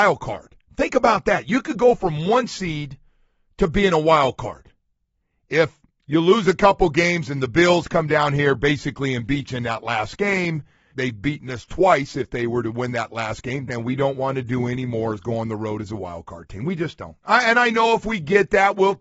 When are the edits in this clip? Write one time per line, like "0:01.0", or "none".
0:10.9
0:13.7